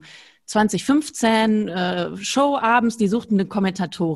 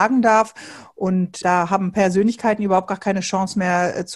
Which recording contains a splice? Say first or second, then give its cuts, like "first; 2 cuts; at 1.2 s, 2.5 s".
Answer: second; 1 cut; at 1.4 s